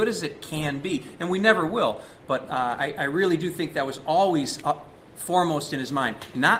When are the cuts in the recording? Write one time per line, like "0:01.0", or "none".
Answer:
none